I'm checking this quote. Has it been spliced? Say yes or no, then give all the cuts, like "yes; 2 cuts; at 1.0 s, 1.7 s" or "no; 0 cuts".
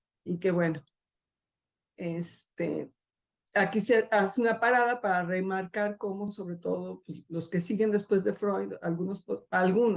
no; 0 cuts